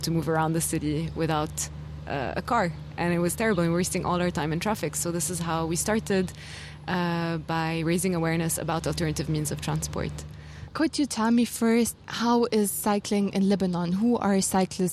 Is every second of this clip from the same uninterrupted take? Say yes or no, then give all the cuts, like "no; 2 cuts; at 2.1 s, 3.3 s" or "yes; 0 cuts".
yes; 0 cuts